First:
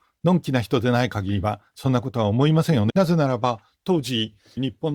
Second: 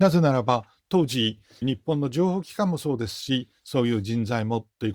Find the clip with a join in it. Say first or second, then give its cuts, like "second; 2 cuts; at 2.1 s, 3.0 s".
first; 1 cut; at 2.9 s